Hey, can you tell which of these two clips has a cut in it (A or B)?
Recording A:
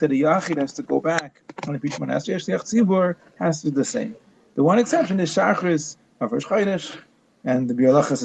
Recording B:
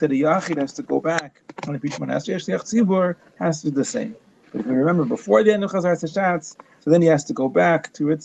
B